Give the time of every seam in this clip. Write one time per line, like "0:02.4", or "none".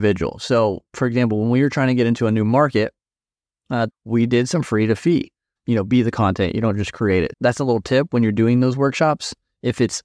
0:03.9
0:05.6
0:07.3